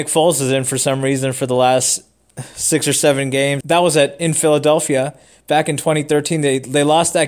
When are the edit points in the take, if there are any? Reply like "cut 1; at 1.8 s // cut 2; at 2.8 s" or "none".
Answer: cut 1; at 3.6 s

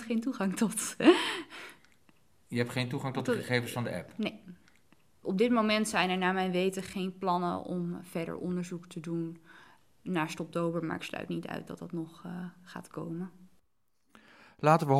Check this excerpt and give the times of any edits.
none

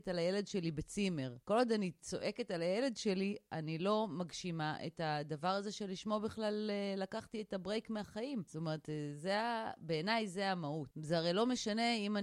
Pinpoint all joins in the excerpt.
cut 1; at 10.9 s

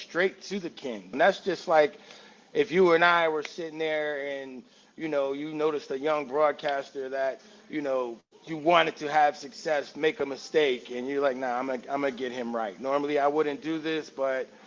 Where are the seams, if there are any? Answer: cut 1; at 1.1 s

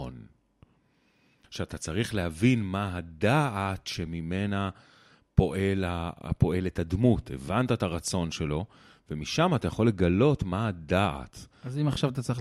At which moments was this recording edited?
cut 1; at 1.4 s

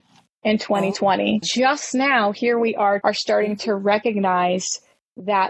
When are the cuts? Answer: cut 1; at 1.4 s // cut 2; at 3.0 s

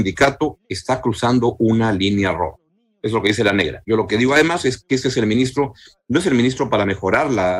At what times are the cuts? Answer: none

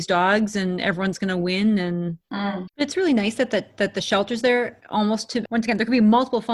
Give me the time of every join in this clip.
cut 1; at 2.7 s // cut 2; at 5.5 s

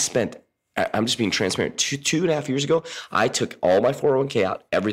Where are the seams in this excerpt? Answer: none

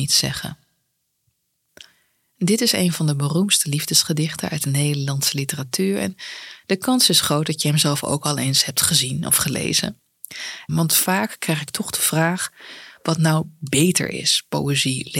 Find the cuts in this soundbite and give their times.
cut 1; at 10.7 s

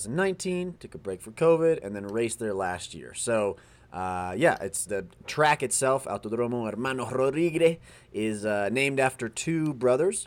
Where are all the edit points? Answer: cut 1; at 4.9 s

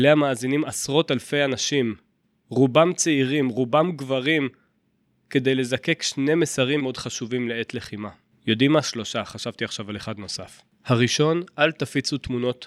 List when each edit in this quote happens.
cut 1; at 6.8 s

